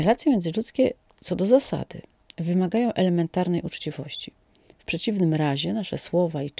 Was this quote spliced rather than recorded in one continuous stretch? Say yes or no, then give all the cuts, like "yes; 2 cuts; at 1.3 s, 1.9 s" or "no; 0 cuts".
no; 0 cuts